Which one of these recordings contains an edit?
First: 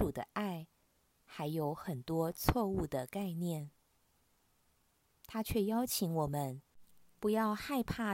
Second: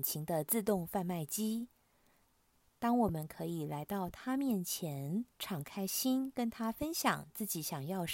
second; 2 cuts; at 2.6 s, 5.3 s

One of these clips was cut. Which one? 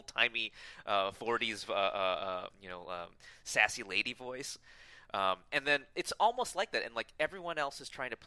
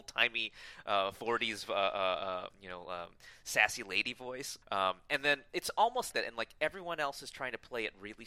second; 2 cuts; at 4.6 s, 6.1 s

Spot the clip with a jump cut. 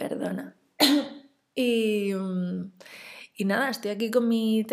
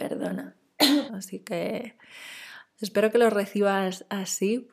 second; 1 cut; at 1.1 s

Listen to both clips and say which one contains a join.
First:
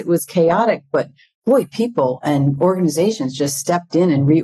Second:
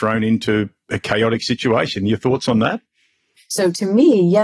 second; 1 cut; at 3.4 s

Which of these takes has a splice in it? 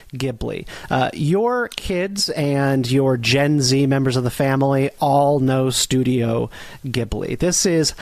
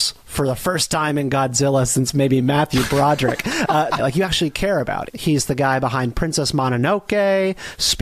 second; 2 cuts; at 4.0 s, 5.1 s

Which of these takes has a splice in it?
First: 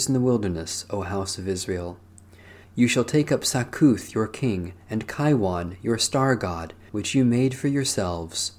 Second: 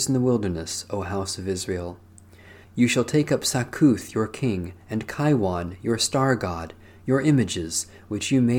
first; 1 cut; at 6.9 s

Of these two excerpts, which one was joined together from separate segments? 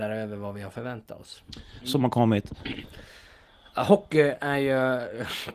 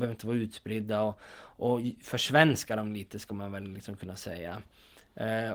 first; 1 cut; at 1.8 s

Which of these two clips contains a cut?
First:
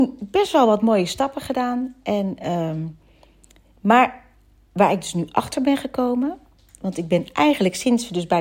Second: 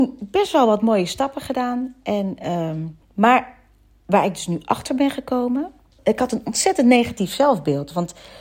second; 2 cuts; at 3.0 s, 6.0 s

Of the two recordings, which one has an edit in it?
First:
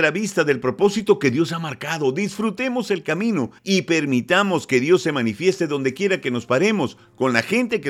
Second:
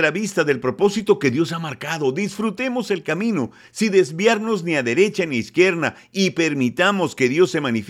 first; 1 cut; at 3.6 s

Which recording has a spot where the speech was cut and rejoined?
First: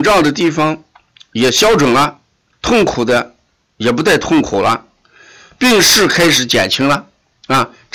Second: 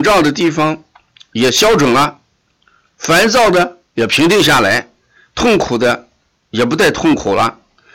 first; 1 cut; at 2.5 s

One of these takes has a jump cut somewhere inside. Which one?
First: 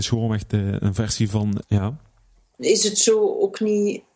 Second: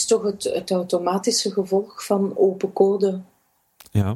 first; 1 cut; at 1.6 s

